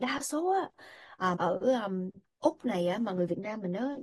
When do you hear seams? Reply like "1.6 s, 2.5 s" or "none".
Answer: 1.4 s